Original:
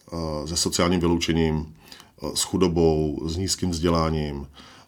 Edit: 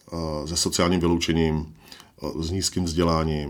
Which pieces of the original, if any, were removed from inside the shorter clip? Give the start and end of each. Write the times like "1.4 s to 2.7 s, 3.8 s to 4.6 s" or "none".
2.3 s to 3.2 s